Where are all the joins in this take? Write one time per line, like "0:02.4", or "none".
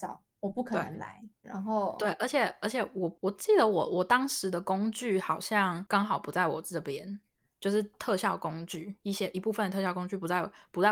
0:01.4

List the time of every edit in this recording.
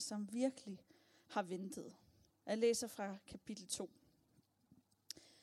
0:02.4

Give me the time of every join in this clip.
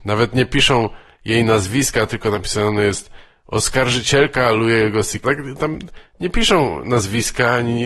0:05.2

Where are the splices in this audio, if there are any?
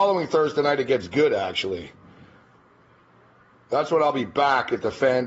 none

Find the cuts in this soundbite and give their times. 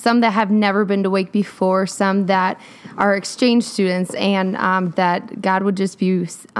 0:04.9

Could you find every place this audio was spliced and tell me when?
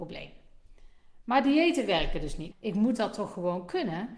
0:02.5

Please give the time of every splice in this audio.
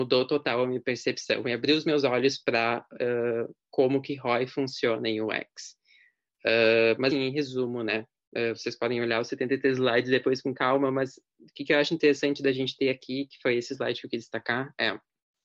0:07.1

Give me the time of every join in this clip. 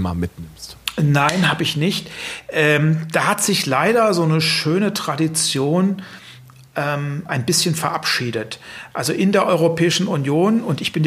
none

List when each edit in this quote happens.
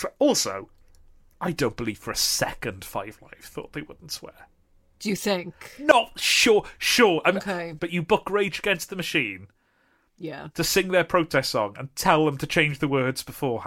0:07.8

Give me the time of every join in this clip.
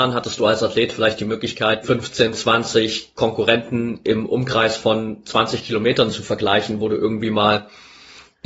0:01.8

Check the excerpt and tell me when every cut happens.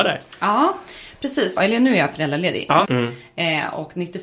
0:01.6
0:02.8

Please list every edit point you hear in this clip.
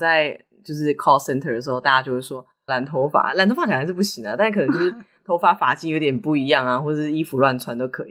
0:02.7

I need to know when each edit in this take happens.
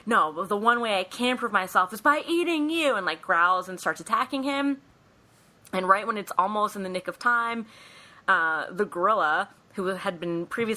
none

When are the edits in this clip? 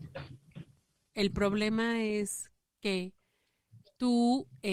0:01.1

